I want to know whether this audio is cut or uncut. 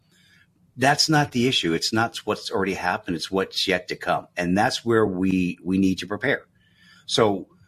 uncut